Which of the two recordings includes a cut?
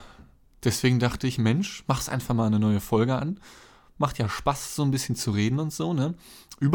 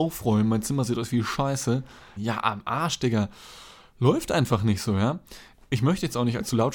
second; 1 cut; at 2.2 s

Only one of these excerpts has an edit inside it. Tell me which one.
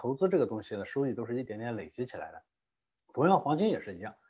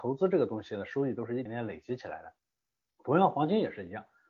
second; 1 cut; at 1.5 s

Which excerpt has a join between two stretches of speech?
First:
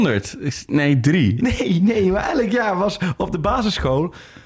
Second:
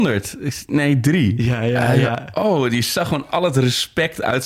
first; 1 cut; at 1.4 s

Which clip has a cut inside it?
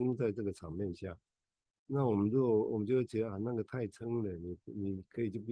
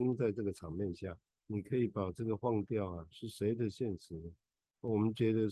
second; 2 cuts; at 1.4 s, 3.1 s

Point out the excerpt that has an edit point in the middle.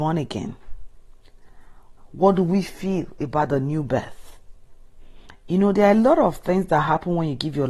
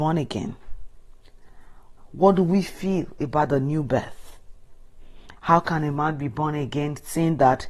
second; 1 cut; at 5.4 s

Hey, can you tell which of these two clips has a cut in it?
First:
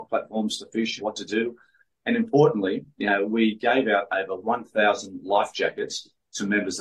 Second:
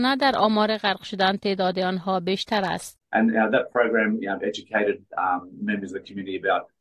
first; 1 cut; at 1.0 s

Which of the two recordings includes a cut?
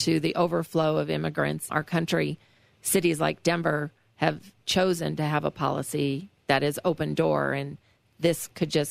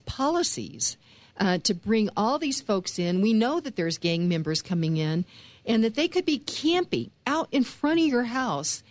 first; 1 cut; at 1.7 s

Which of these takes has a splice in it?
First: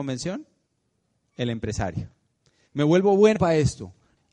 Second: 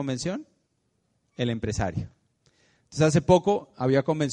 first; 1 cut; at 2.6 s

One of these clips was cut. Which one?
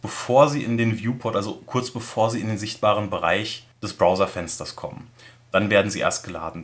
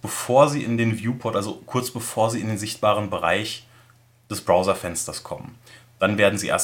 first; 1 cut; at 3.7 s

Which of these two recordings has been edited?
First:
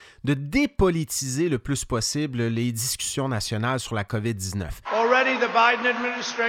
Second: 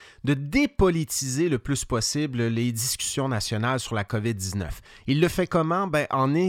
first; 1 cut; at 4.8 s

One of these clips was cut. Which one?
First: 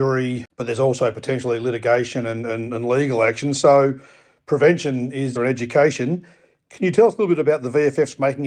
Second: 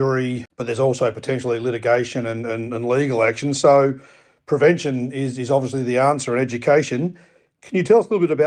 first; 1 cut; at 5.4 s

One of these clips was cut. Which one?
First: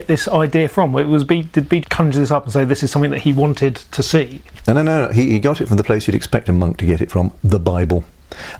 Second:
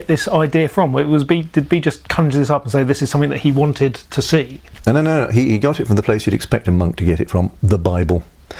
first; 1 cut; at 1.8 s

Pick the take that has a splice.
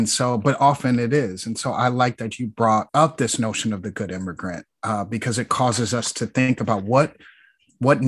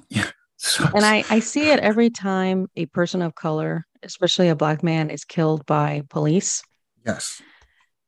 first; 1 cut; at 2.9 s

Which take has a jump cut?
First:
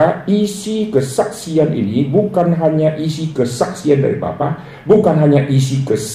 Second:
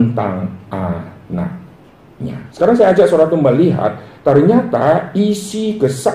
second; 1 cut; at 2.5 s

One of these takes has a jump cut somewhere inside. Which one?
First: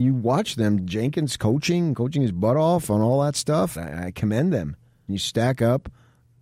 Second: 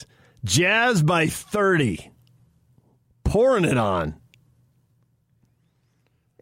first; 2 cuts; at 3.8 s, 5.1 s

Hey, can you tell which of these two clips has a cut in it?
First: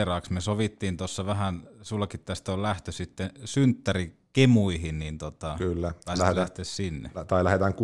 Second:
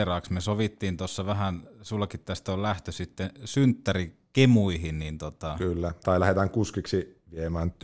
second; 1 cut; at 6.0 s

